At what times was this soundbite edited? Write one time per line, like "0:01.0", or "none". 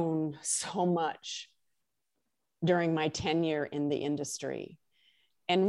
none

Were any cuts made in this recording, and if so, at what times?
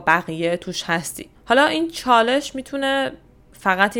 0:01.4

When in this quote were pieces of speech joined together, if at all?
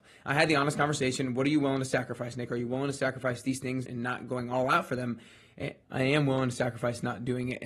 0:03.8
0:05.8

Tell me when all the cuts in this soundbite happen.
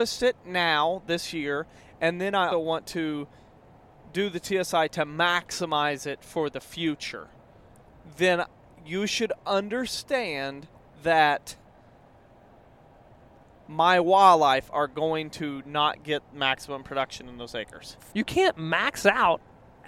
0:02.5
0:18.1

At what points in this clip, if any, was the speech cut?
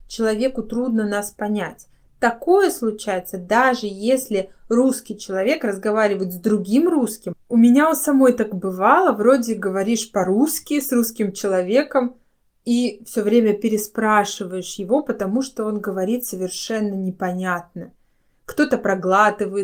none

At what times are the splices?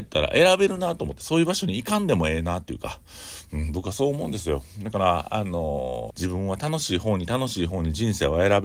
0:06.1

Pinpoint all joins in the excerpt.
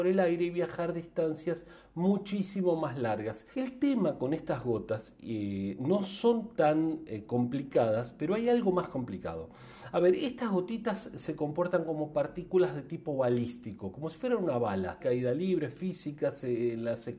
0:03.5
0:15.0

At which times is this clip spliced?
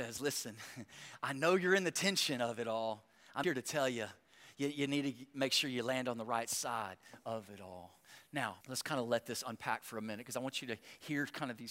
0:03.4
0:08.6

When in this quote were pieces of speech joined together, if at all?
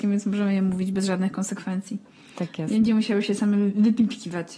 none

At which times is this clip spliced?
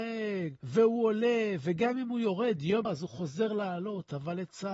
0:02.8

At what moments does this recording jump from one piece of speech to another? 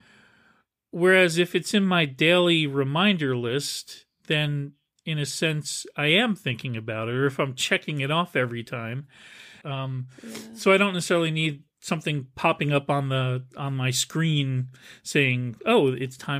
0:09.6

